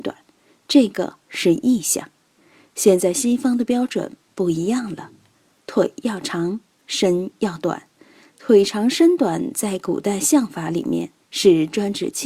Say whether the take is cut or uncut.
uncut